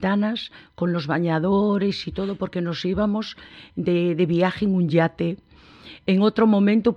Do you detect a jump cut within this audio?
no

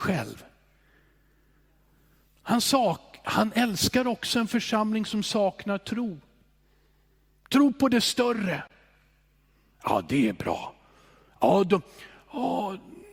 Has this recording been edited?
no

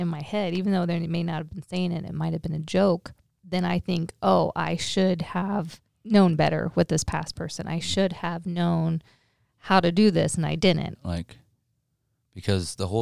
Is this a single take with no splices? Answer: no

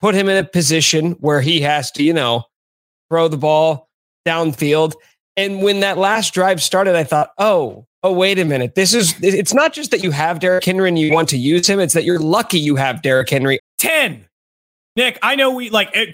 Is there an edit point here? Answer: yes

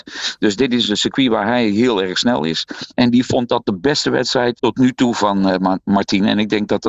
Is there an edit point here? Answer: yes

